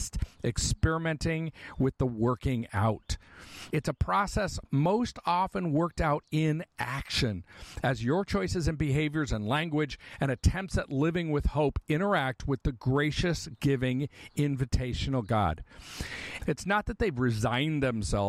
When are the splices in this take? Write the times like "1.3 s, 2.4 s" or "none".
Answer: 3.7 s, 16.4 s